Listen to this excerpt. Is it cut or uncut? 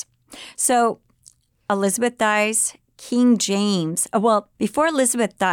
cut